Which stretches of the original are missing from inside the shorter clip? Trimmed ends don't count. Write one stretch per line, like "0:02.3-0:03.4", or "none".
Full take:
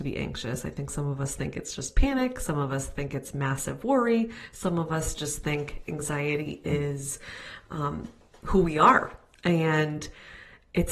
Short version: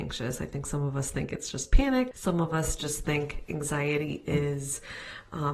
0:02.4-0:04.5